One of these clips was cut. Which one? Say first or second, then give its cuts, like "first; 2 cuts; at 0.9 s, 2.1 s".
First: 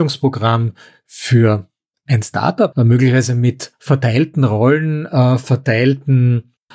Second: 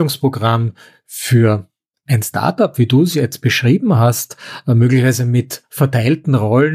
first; 1 cut; at 2.7 s